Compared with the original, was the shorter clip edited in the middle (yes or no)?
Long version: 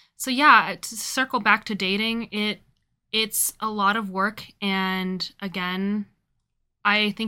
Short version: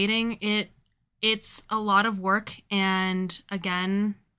no